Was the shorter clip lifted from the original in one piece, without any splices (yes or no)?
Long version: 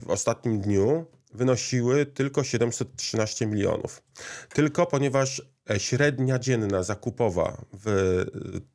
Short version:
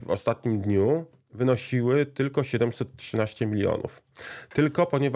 yes